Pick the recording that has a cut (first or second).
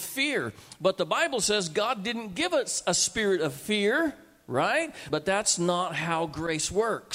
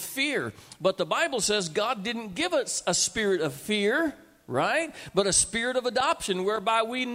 first